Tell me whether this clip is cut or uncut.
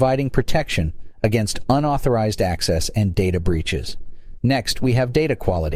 cut